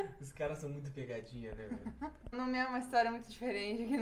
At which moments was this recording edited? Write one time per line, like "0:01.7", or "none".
0:02.3

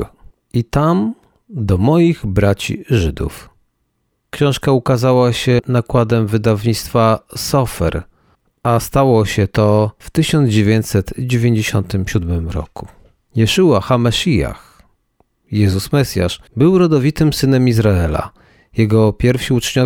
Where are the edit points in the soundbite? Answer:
0:04.3
0:13.3
0:16.5

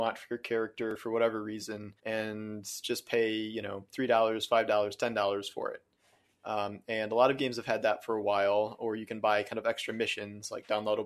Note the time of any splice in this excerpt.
0:02.0

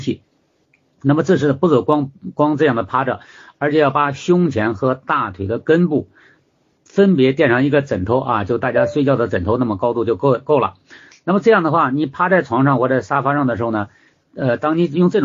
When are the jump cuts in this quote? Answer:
none

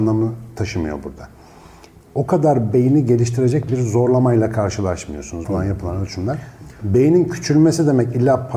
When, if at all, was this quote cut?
0:02.0
0:05.4

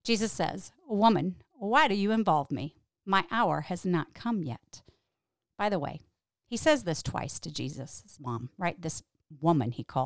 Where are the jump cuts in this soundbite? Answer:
none

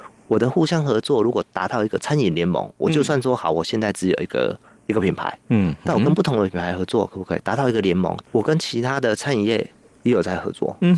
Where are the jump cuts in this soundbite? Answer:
0:08.2

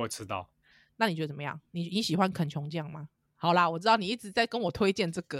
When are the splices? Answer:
0:03.3

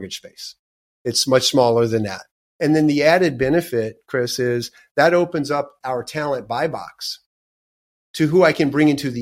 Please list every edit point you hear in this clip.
0:02.6

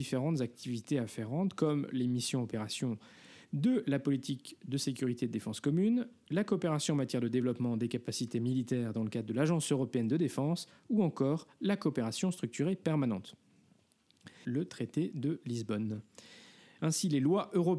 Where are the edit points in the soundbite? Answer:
0:14.4
0:16.8

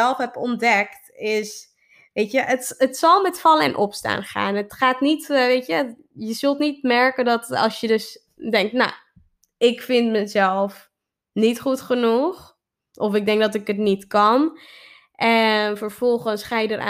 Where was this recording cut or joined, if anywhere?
none

